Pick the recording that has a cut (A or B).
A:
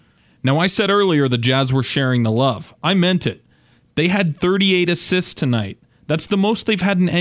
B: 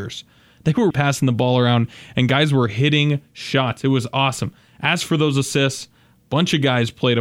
B